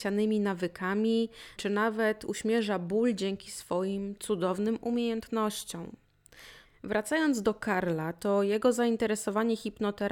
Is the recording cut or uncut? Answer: cut